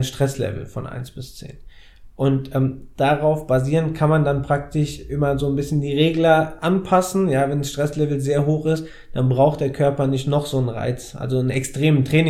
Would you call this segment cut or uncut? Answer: uncut